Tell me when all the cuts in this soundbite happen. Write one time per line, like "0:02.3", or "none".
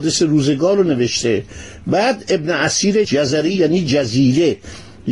0:03.0